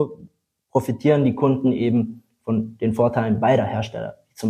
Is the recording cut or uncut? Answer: uncut